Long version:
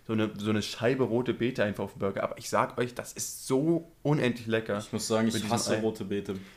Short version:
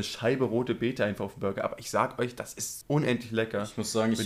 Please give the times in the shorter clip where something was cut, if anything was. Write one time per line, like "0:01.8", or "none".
0:02.8